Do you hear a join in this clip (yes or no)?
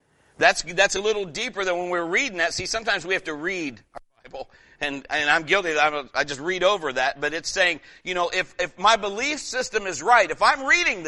no